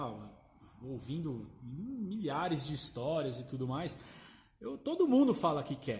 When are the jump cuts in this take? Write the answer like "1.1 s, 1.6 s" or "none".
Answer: none